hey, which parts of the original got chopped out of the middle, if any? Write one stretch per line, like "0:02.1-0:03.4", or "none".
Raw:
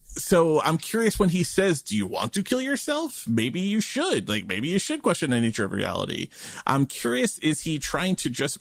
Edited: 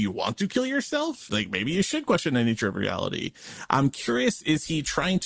0:03.2-0:04.3

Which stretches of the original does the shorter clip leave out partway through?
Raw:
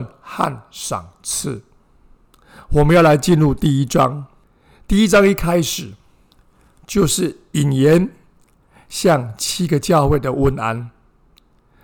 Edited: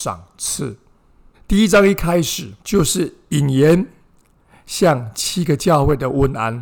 0:02.2-0:04.7
0:06.0-0:06.8

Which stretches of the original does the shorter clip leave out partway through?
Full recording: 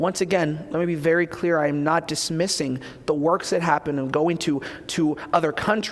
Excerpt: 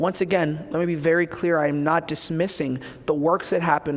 none

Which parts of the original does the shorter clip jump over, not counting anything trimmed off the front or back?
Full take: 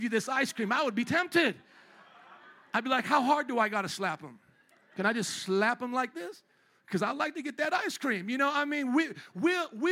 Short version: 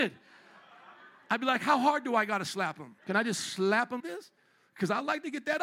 0:04.4-0:04.9
0:05.9-0:06.1

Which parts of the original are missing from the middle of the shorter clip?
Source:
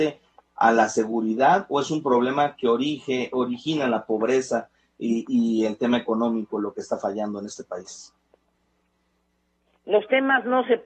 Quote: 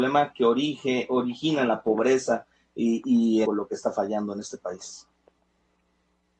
0:05.7-0:06.5

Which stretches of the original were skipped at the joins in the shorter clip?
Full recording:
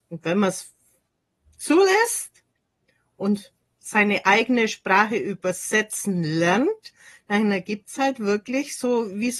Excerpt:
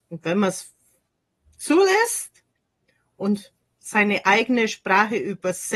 none

